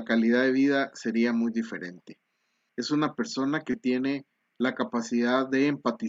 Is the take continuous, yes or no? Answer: no